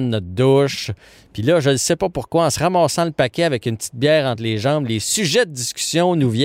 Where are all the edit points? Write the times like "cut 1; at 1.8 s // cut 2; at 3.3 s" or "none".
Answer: none